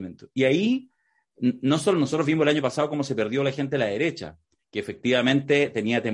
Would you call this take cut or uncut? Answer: uncut